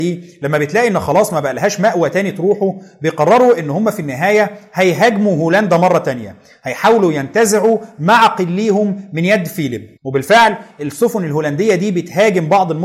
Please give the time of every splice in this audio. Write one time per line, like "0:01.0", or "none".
0:10.0